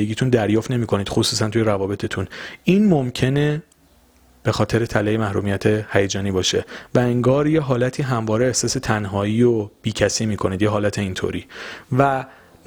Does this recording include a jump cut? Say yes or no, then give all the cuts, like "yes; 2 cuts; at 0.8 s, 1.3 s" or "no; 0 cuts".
no; 0 cuts